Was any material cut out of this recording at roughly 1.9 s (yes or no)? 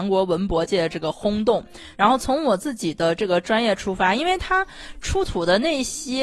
yes